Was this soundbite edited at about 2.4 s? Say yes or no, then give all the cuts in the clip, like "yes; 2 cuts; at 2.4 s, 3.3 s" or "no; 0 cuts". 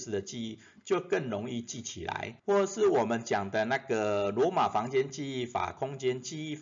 yes; 1 cut; at 2.4 s